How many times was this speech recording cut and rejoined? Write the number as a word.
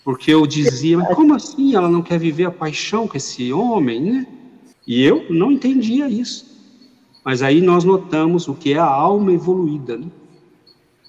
one